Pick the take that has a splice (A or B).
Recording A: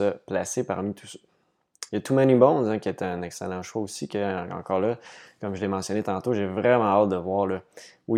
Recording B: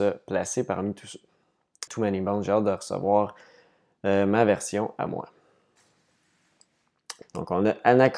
B